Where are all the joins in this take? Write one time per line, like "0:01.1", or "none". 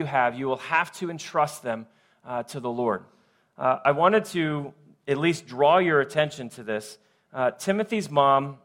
none